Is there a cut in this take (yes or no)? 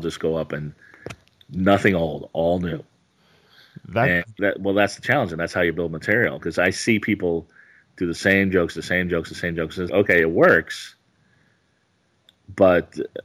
yes